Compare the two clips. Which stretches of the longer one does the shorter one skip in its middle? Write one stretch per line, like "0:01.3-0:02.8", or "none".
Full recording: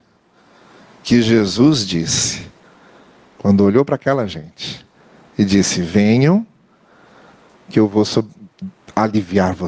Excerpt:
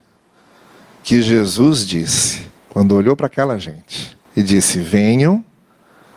0:02.6-0:03.3
0:04.9-0:05.3

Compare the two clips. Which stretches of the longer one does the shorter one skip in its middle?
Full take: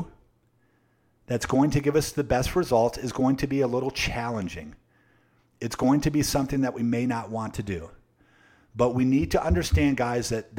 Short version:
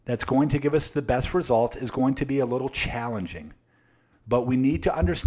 0:05.3-0:08.6

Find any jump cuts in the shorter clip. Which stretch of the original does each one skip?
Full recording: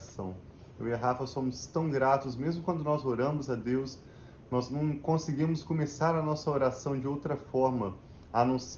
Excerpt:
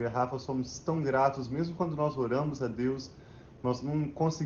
none

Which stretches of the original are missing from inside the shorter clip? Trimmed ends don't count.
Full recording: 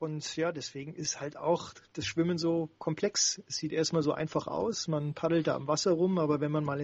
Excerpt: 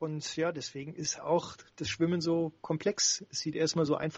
0:01.2-0:01.3

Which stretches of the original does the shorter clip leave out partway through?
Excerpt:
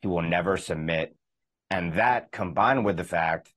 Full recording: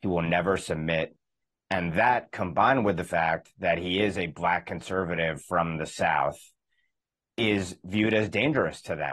none

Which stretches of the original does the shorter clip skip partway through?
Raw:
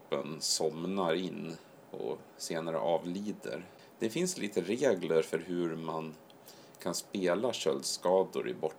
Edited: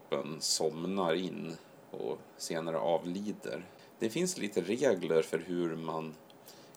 none

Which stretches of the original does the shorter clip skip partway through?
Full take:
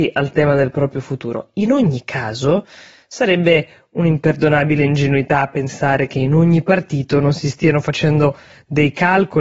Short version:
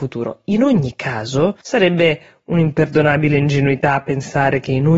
0:02.7-0:03.1

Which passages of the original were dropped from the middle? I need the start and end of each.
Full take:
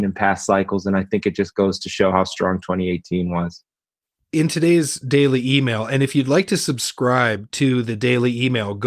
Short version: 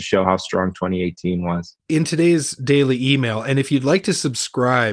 0:03.7-0:04.2

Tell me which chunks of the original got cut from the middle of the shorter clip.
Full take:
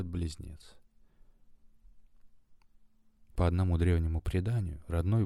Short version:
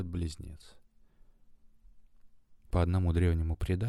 0:02.6-0:03.2

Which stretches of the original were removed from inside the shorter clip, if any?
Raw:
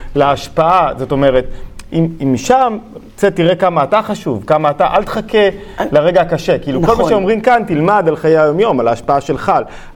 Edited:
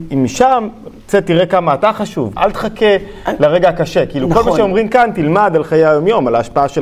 0:04.5-0:04.9

